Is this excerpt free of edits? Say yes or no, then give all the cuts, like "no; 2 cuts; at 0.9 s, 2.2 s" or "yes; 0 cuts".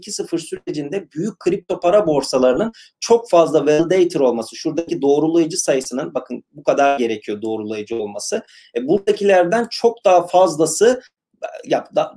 yes; 0 cuts